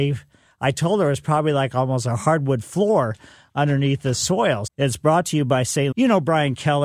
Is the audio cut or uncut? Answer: cut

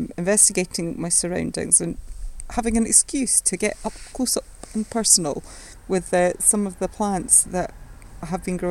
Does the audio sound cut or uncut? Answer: uncut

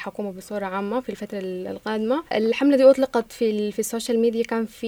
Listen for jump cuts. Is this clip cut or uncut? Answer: uncut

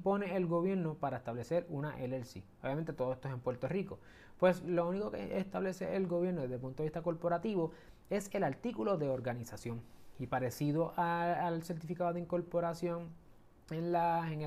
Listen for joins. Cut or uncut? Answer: uncut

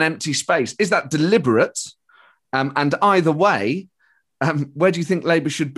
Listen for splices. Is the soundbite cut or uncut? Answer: uncut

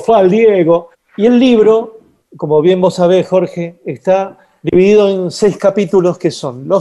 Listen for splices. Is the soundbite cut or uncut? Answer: cut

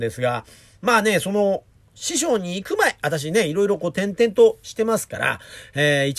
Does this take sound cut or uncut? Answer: uncut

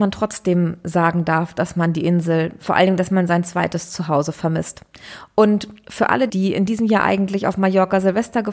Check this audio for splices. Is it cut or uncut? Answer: cut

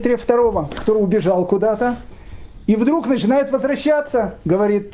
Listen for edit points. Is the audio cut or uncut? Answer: uncut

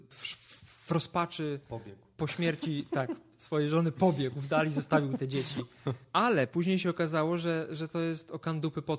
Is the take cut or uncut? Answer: uncut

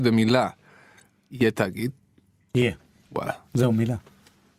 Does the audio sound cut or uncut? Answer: uncut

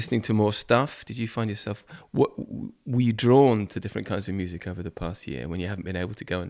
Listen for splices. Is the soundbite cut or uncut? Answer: uncut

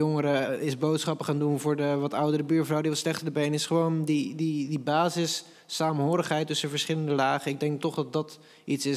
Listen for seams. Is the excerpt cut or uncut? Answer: uncut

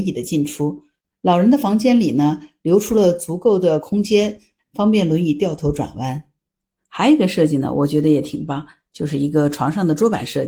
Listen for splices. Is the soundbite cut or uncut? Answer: uncut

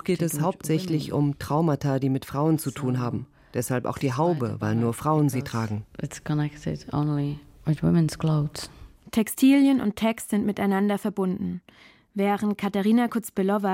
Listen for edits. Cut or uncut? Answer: uncut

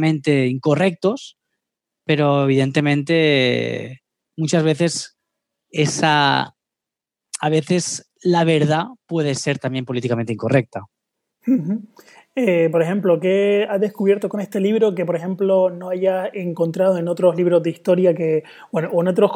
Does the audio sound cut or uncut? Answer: uncut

